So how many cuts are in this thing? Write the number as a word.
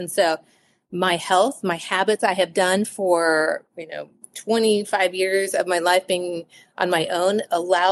zero